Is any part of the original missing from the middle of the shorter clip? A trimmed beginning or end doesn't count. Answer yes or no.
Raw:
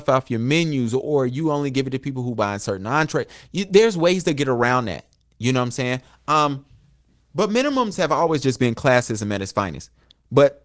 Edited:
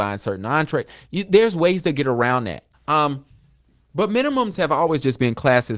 yes